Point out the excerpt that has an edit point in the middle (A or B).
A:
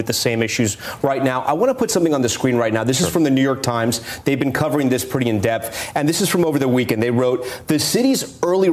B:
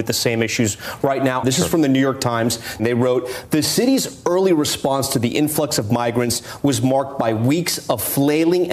B